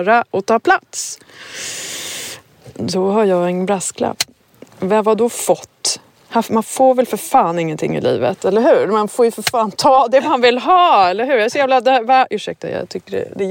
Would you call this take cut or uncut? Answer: uncut